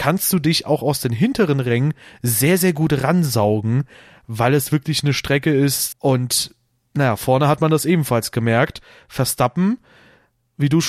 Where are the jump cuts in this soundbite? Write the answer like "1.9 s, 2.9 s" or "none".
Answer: 5.9 s